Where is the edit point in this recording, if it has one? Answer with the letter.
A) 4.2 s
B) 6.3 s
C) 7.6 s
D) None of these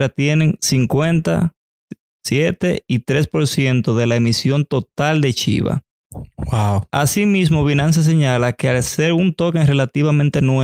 D